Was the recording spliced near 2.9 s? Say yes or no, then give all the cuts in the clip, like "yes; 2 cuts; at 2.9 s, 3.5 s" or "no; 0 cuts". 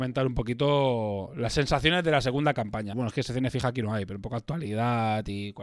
yes; 1 cut; at 2.9 s